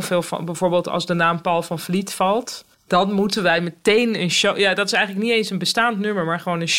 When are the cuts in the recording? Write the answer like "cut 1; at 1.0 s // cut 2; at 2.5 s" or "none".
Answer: cut 1; at 2.7 s